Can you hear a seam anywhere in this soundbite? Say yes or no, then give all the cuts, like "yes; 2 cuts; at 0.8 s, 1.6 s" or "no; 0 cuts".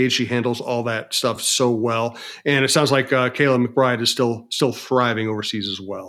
no; 0 cuts